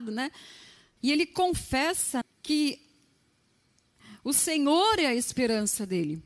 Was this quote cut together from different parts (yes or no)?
yes